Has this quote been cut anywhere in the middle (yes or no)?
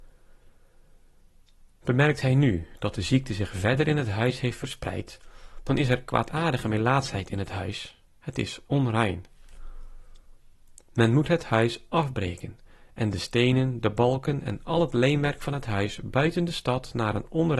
no